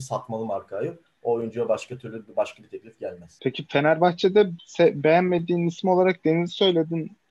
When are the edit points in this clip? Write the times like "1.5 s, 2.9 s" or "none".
none

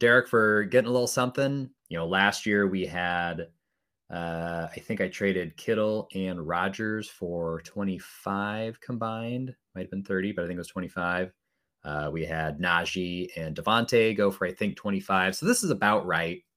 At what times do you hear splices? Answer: 1.8 s

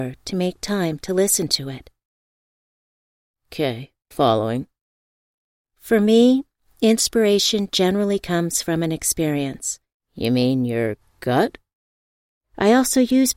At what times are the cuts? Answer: 4.1 s, 10.0 s, 12.4 s

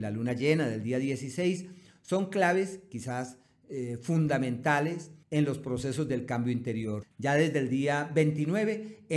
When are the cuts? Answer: 5.2 s, 7.0 s

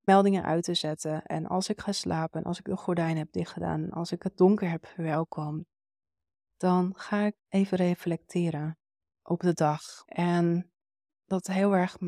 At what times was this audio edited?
7.4 s, 10.1 s

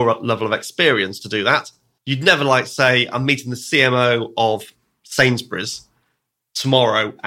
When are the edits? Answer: 2.0 s

